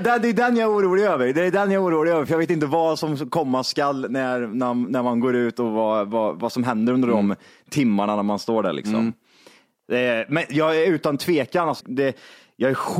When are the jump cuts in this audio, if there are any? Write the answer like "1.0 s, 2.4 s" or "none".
11.8 s